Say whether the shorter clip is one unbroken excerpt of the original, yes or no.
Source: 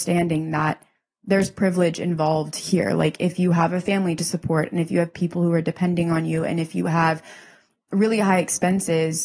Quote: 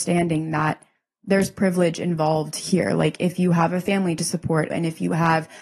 no